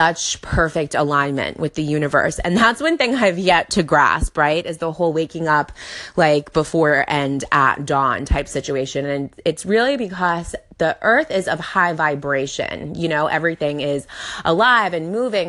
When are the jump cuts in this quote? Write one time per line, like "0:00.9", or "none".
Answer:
none